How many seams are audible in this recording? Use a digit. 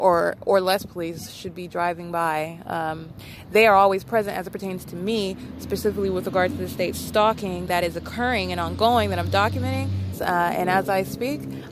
1